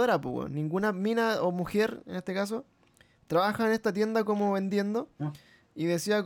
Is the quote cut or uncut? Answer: uncut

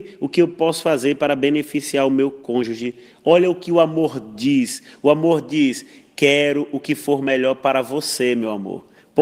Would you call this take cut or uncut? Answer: uncut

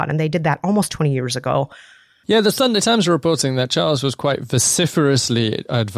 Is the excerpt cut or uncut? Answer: cut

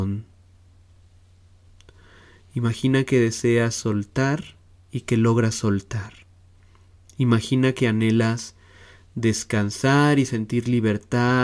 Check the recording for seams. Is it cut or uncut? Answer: uncut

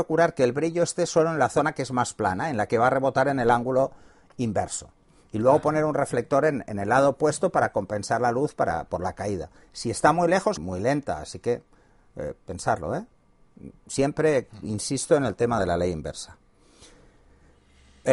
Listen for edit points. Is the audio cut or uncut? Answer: cut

